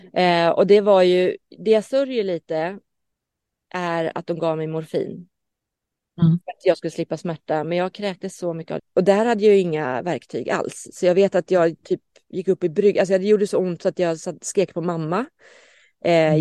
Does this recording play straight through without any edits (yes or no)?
no